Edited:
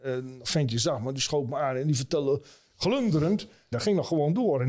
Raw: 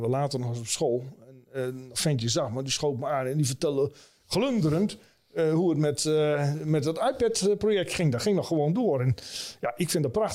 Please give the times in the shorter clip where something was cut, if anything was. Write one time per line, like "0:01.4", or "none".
0:03.7